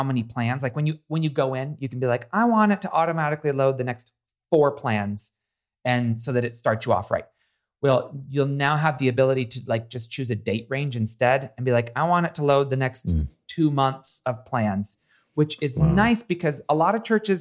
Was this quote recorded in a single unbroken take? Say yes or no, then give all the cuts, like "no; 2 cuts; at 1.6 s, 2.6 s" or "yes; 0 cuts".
yes; 0 cuts